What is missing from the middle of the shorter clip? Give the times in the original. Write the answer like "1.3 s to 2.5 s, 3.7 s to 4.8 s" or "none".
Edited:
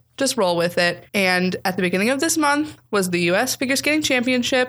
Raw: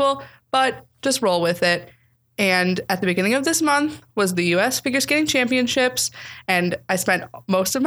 1.9 s to 2.3 s